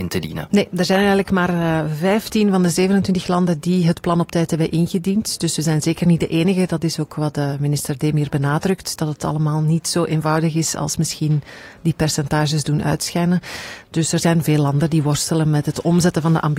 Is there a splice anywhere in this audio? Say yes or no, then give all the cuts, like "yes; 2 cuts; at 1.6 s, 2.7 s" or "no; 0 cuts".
no; 0 cuts